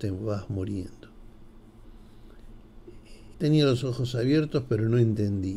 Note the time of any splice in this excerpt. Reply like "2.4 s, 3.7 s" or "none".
3.3 s